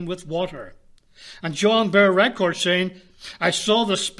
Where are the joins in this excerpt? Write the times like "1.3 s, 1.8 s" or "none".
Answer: none